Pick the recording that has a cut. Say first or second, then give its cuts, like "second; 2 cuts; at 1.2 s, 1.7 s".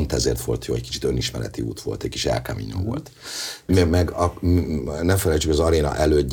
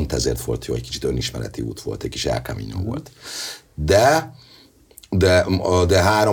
first; 1 cut; at 3.7 s